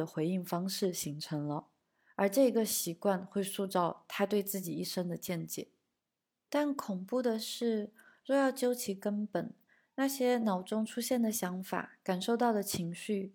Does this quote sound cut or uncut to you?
uncut